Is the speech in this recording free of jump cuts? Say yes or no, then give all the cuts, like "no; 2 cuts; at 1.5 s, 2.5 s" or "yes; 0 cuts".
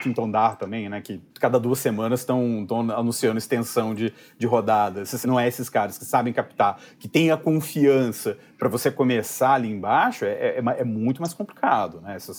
no; 2 cuts; at 1.3 s, 5.2 s